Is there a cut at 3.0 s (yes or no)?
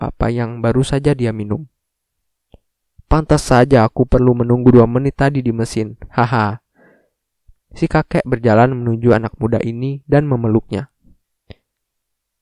yes